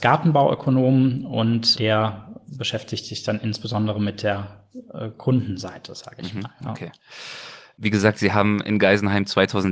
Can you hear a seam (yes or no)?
yes